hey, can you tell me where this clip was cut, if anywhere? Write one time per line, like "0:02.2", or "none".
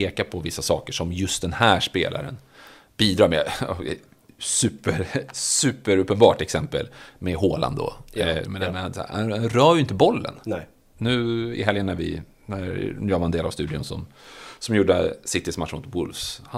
0:08.5